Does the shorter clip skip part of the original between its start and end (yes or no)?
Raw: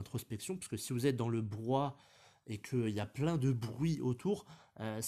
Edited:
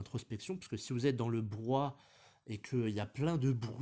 no